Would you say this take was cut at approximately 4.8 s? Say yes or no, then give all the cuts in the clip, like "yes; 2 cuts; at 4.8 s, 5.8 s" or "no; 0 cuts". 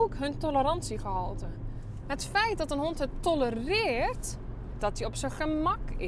yes; 2 cuts; at 2.0 s, 4.8 s